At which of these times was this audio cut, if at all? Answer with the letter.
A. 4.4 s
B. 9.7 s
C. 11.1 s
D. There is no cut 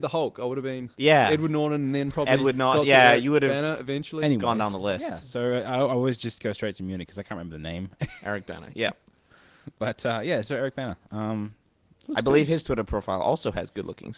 D